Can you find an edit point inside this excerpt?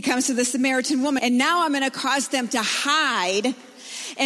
yes; 1 cut; at 1.2 s

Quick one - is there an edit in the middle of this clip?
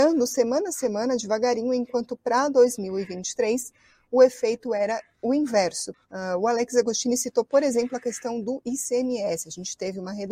yes; 1 cut; at 5.9 s

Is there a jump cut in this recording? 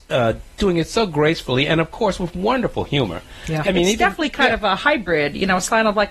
yes; 1 cut; at 3.6 s

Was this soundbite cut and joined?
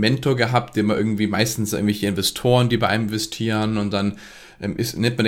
no; 0 cuts

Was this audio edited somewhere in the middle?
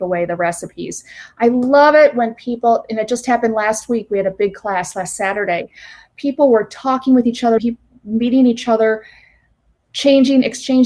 yes; 1 cut; at 7.6 s

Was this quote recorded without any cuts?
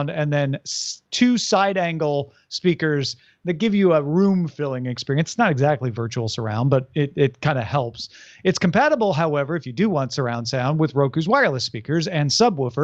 yes; 0 cuts

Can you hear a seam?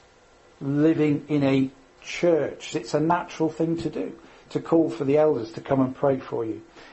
yes; 1 cut; at 2.7 s

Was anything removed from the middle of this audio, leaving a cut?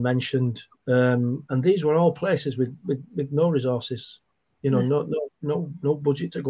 no; 0 cuts

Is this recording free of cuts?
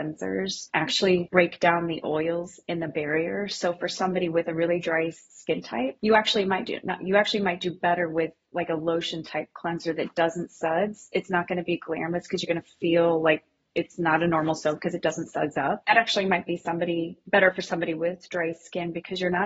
yes; 0 cuts

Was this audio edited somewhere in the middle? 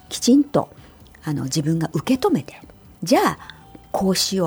yes; 1 cut; at 2.9 s

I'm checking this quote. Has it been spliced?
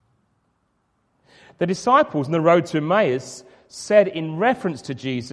no; 0 cuts

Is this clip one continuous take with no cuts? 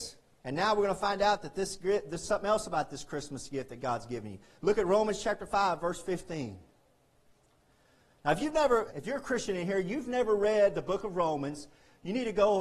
no; 1 cut; at 8.9 s

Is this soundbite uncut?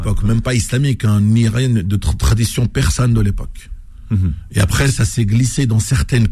yes; 0 cuts

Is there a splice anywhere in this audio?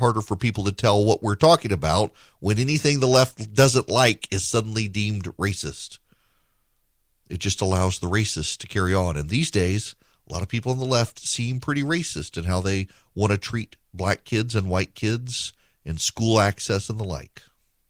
no; 0 cuts

